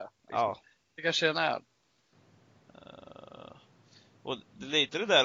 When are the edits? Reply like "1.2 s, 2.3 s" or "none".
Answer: none